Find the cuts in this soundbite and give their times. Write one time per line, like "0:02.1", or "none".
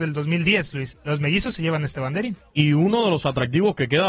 0:00.9